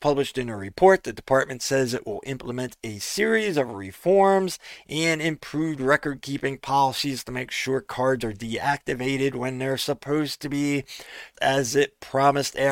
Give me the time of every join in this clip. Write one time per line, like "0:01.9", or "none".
0:11.3